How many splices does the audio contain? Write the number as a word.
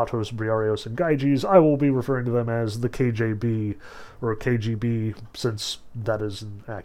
zero